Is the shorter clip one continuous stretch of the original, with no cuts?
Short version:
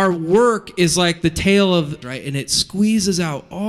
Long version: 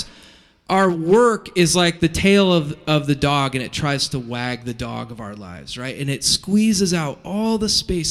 no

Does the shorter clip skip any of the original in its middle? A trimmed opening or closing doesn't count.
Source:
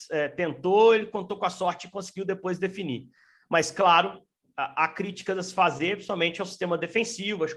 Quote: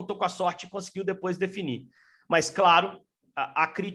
no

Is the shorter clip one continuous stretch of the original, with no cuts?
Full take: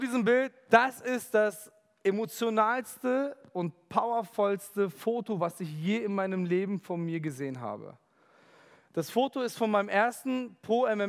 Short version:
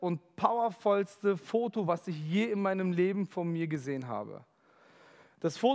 yes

